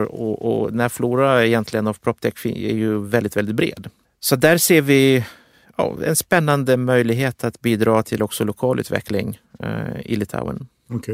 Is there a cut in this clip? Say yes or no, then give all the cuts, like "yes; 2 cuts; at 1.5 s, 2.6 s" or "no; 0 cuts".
yes; 2 cuts; at 4.0 s, 8.0 s